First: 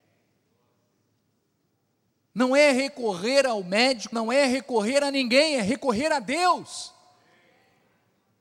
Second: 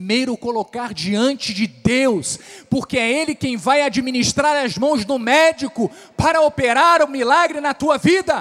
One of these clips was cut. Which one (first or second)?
first